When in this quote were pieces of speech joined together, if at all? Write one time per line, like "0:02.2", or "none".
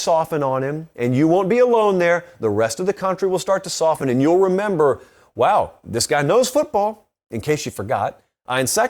none